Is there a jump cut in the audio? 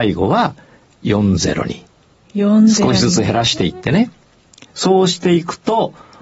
no; 0 cuts

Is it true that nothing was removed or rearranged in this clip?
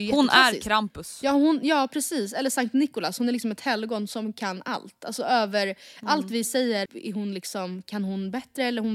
no; 1 cut; at 6.9 s

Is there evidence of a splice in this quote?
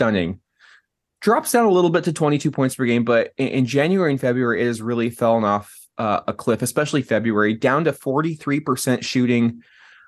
no; 0 cuts

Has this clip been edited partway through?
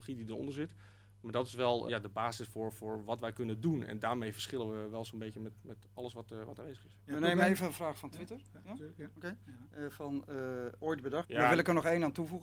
yes; 2 cuts; at 1.9 s, 11.2 s

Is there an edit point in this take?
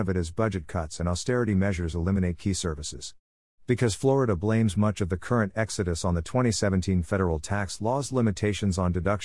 no; 0 cuts

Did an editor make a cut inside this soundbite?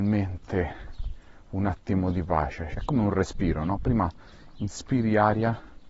yes; 1 cut; at 2.7 s

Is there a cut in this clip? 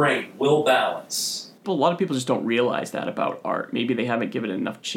yes; 1 cut; at 1.6 s

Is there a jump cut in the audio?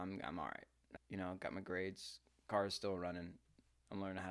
yes; 1 cut; at 1.0 s

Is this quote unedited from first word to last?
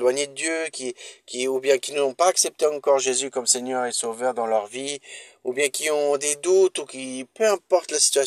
yes; 0 cuts

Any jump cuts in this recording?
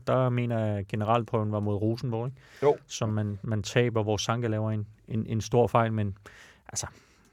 no; 0 cuts

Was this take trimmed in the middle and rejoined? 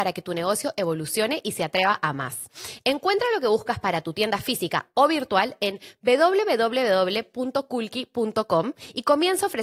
no; 0 cuts

